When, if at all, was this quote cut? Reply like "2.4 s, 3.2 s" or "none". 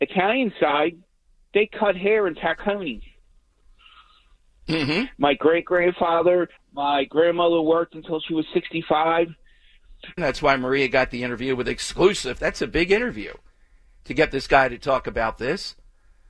6.6 s, 10.2 s, 12.4 s